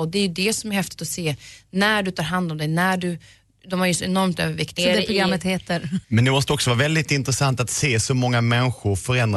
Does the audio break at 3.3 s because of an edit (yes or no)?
no